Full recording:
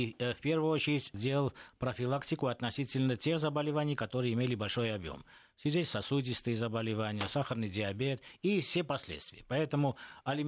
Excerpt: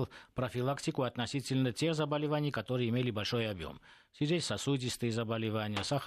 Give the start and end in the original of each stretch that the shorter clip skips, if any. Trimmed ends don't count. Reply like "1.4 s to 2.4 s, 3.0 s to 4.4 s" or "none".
none